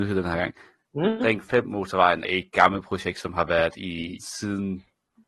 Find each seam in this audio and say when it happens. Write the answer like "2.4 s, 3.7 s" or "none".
2.2 s, 4.2 s